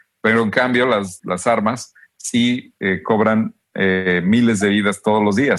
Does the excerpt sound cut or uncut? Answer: cut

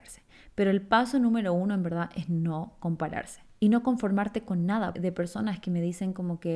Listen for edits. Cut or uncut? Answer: cut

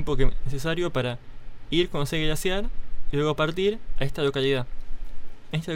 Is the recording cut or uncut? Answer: uncut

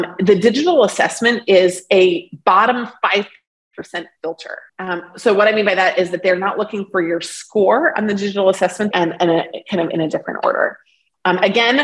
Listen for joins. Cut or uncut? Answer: cut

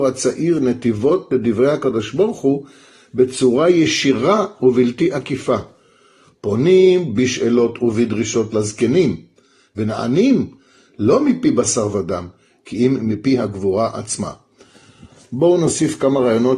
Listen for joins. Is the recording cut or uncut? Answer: uncut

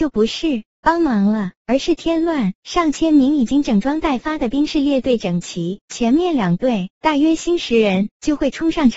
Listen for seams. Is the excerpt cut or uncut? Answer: cut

